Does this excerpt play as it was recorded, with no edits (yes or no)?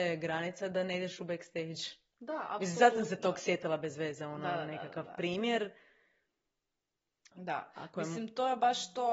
no